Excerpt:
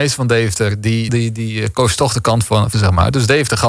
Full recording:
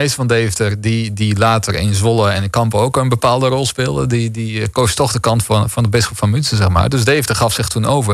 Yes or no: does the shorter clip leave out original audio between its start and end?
yes